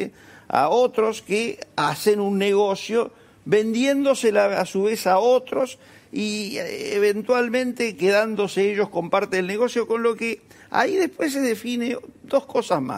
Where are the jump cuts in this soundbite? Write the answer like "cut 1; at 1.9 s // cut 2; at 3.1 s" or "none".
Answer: none